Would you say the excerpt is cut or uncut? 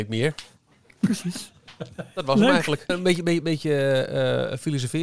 cut